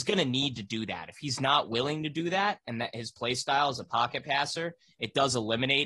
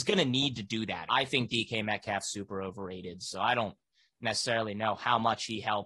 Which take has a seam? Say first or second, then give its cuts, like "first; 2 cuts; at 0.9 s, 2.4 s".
second; 1 cut; at 1.1 s